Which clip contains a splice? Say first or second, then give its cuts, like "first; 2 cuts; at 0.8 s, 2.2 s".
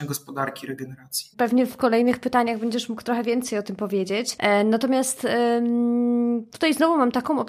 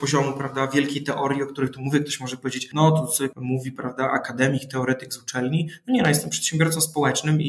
first; 1 cut; at 1.3 s